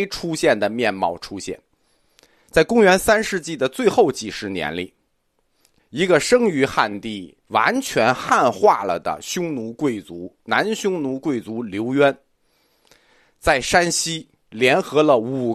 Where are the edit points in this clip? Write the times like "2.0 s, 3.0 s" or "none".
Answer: 5.8 s, 7.4 s